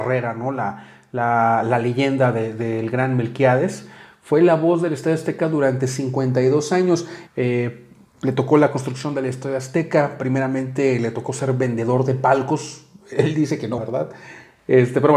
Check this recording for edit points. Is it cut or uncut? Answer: cut